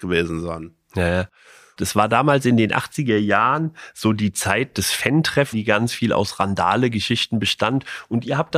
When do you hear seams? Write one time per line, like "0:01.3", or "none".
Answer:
0:01.8
0:05.5